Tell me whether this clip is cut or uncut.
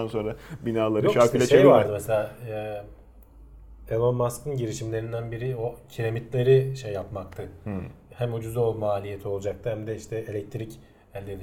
cut